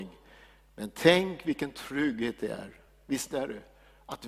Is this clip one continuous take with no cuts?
yes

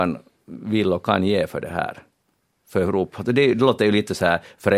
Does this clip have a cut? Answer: no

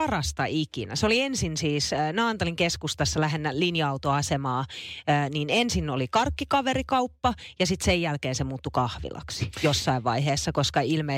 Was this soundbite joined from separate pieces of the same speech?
no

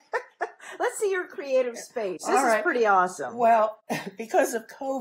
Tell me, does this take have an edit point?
no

